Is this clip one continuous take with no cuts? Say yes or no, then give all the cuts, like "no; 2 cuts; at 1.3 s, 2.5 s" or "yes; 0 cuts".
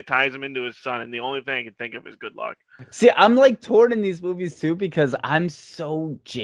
yes; 0 cuts